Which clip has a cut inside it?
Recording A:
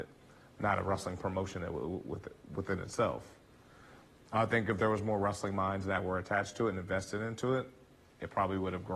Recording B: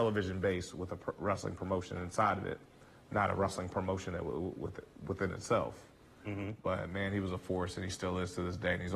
B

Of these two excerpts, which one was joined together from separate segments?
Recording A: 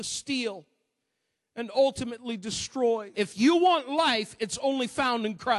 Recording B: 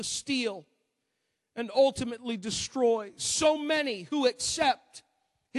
A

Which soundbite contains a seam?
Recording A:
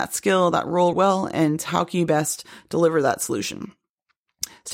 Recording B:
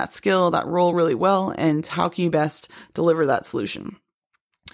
A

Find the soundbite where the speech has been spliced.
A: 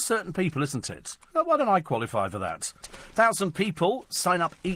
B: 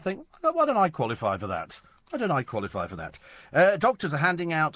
A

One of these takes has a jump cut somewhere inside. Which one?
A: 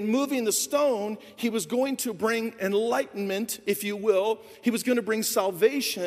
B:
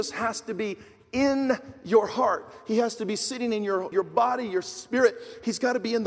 B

